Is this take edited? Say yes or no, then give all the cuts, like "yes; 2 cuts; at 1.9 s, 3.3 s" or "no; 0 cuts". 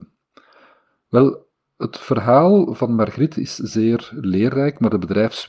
no; 0 cuts